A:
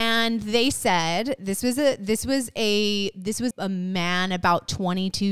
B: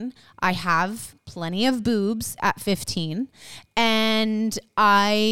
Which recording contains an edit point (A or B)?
A